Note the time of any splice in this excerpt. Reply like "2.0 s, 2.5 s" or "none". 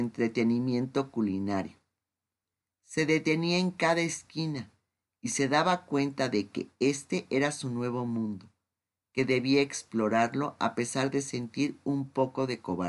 none